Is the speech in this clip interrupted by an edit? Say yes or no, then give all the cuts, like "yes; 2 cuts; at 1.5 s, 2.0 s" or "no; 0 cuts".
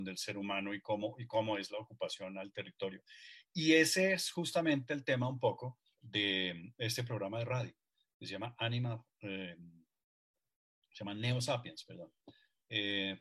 no; 0 cuts